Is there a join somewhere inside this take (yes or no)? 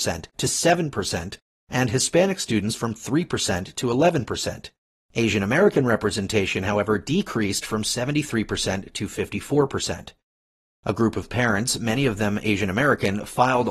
no